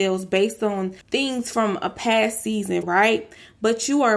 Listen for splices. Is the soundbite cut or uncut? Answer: cut